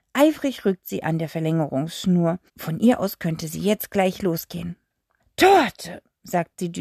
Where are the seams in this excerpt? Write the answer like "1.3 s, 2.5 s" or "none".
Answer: 2.5 s, 5.2 s